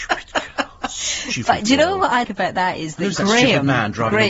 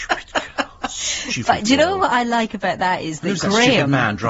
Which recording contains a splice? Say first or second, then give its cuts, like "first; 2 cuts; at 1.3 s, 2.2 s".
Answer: first; 1 cut; at 2.2 s